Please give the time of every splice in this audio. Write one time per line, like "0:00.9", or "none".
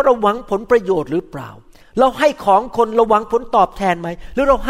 none